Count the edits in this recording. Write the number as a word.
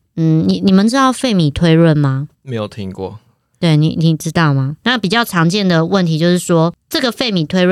two